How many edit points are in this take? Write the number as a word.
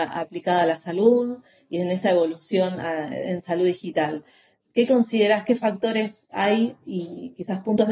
zero